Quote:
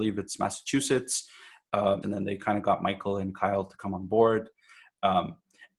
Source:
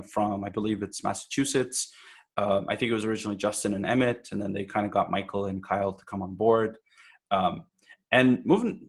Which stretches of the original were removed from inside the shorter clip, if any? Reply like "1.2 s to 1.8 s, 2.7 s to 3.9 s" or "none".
2.7 s to 4.3 s